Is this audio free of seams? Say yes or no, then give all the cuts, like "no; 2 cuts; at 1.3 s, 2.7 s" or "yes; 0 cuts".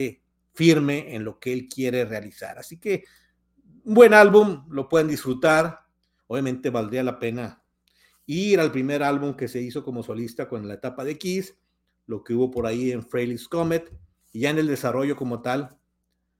no; 1 cut; at 6.2 s